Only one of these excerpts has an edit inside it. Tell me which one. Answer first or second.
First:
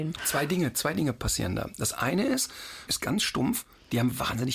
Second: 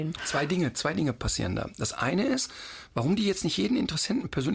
first